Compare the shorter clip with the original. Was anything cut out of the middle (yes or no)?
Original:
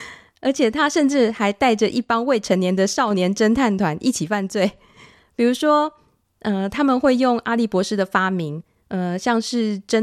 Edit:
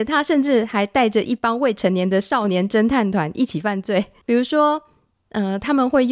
yes